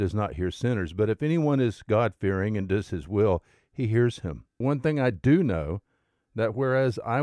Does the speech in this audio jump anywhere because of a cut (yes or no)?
yes